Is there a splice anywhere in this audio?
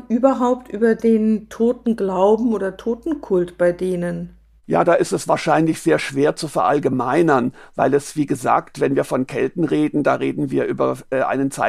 no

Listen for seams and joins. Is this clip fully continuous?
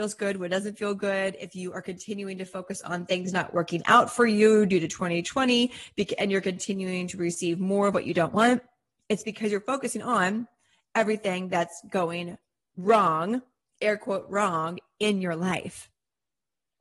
yes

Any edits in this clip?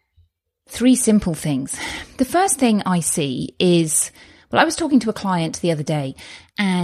no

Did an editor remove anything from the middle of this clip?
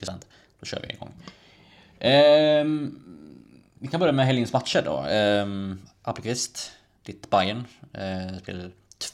no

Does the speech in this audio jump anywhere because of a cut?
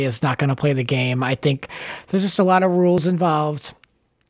no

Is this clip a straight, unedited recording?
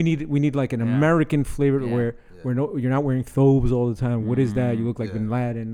yes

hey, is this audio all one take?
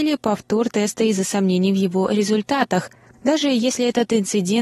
no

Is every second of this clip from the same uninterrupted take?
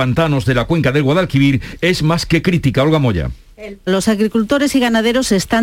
no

